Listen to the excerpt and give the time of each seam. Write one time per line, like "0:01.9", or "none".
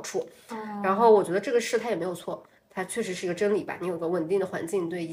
none

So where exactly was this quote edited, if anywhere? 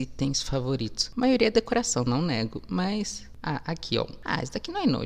none

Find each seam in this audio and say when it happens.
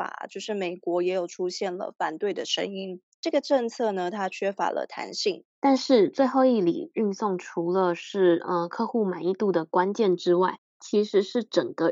0:03.1
0:05.5

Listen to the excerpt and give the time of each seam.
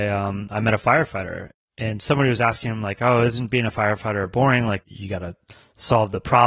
none

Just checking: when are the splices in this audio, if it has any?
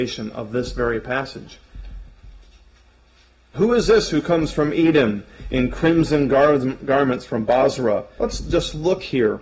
0:03.5
0:08.2

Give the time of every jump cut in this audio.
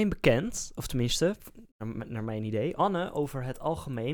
0:02.8

